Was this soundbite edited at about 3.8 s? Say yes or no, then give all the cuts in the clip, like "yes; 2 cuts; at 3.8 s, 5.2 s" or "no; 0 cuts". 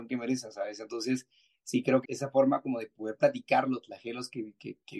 no; 1 cut; at 2.0 s